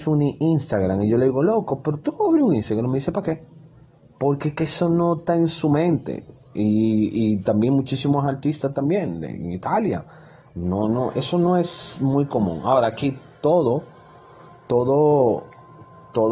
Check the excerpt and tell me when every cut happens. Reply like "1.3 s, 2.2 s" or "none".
none